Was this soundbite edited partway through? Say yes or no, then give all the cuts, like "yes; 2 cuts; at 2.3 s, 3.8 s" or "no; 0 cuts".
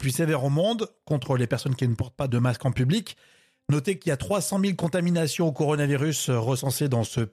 yes; 1 cut; at 2.3 s